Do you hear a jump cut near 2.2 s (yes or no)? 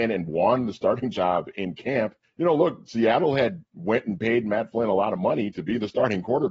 yes